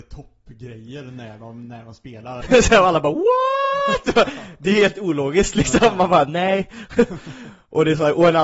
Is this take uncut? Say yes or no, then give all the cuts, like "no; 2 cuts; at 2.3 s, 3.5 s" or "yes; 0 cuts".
no; 1 cut; at 2.4 s